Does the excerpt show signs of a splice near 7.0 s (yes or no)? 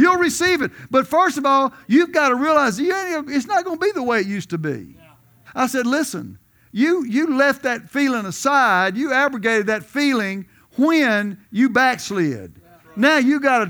no